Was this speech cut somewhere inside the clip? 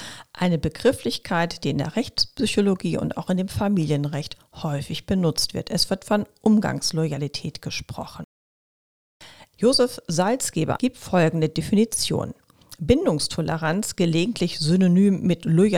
yes; 2 cuts; at 9.5 s, 10.8 s

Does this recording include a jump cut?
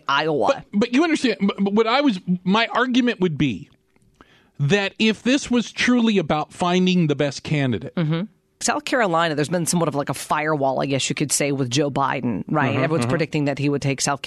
yes; 1 cut; at 8.6 s

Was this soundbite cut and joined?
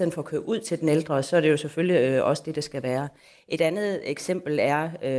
no; 0 cuts

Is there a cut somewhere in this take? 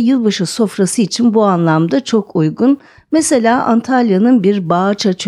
yes; 1 cut; at 3.0 s

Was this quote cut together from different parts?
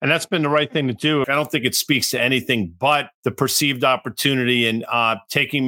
yes; 2 cuts; at 1.2 s, 3.2 s

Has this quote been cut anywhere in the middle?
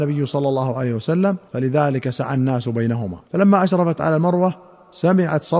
yes; 2 cuts; at 1.5 s, 3.3 s

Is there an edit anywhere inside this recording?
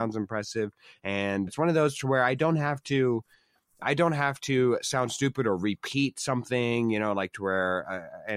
yes; 1 cut; at 1.5 s

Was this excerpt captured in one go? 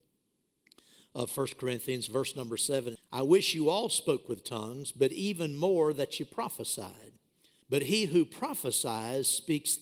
no; 2 cuts; at 3.0 s, 7.6 s

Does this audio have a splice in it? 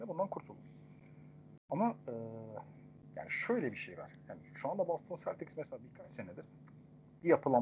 no; 0 cuts

